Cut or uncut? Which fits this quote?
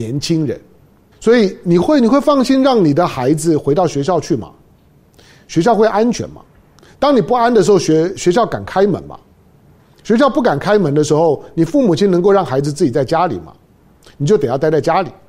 cut